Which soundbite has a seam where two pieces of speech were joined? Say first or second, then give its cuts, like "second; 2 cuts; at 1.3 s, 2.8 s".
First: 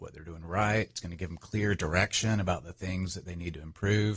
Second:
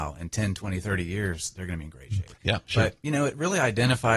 second; 1 cut; at 2.4 s